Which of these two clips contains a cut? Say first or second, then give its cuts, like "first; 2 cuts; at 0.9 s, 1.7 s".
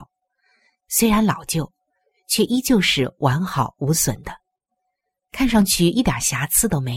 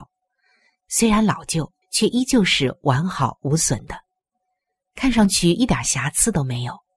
second; 1 cut; at 1.8 s